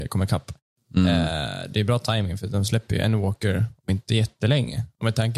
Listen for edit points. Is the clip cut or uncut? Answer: uncut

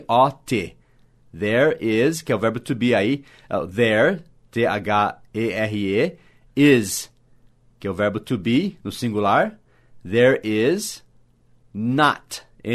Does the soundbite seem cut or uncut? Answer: uncut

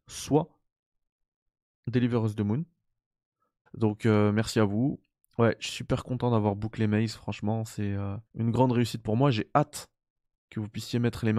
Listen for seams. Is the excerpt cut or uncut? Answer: cut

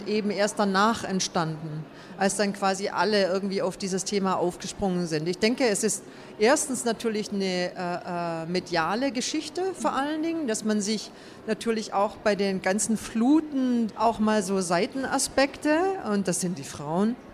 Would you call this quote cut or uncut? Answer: cut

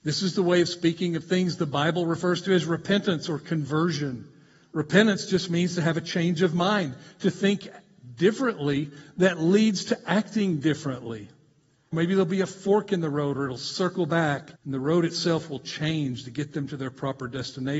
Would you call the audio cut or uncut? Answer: cut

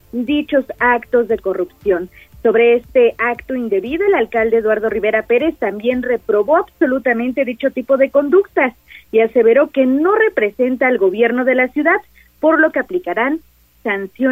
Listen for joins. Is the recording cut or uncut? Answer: uncut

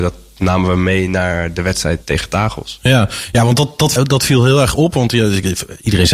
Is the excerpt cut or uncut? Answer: cut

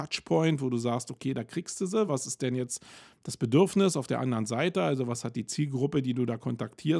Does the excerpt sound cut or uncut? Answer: uncut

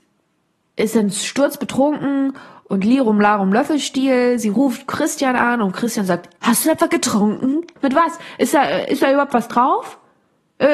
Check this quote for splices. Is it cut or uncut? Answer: cut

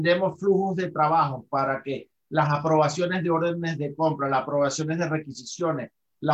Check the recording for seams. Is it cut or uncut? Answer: uncut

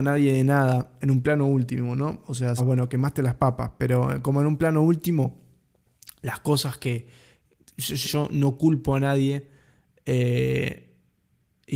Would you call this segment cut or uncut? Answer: cut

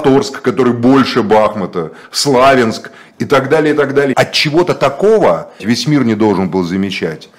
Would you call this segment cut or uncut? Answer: cut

